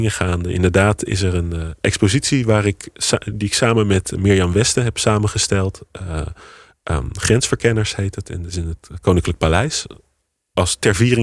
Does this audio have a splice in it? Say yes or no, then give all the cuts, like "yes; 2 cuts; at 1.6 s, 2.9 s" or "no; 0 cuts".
no; 0 cuts